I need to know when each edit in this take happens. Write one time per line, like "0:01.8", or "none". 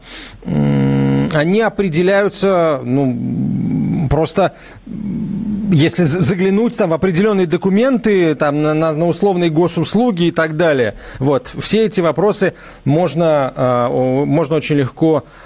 none